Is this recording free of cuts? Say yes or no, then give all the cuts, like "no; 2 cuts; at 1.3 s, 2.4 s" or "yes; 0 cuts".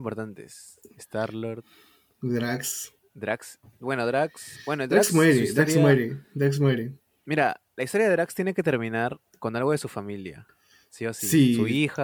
yes; 0 cuts